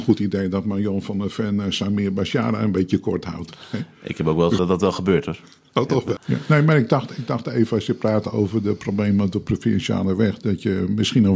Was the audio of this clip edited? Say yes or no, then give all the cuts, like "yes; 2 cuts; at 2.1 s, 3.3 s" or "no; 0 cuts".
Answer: yes; 2 cuts; at 4.6 s, 6.2 s